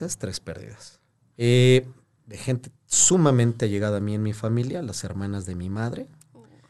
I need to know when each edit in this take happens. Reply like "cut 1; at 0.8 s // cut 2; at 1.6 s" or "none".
cut 1; at 1.3 s